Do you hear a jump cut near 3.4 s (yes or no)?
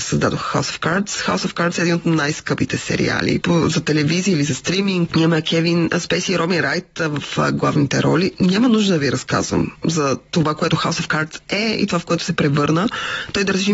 yes